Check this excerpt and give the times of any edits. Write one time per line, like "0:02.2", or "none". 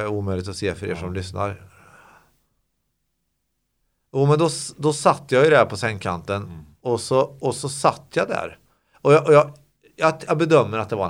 none